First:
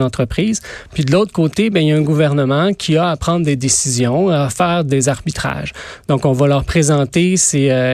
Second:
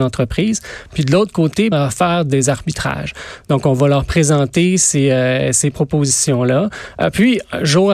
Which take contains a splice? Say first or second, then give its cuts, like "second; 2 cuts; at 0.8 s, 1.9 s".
second; 1 cut; at 1.7 s